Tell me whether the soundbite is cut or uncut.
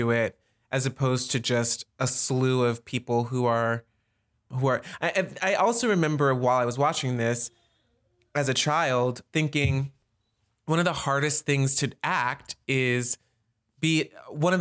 cut